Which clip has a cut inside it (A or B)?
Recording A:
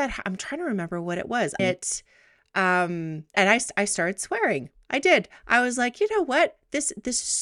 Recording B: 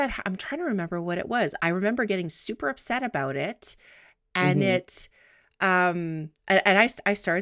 A